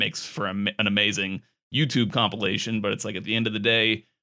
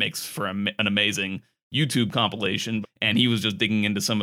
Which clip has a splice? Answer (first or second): second